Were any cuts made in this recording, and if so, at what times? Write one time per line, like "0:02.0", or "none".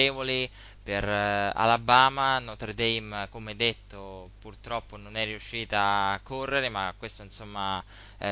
none